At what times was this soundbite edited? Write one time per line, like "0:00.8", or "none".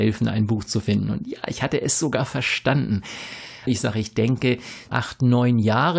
0:03.7
0:04.9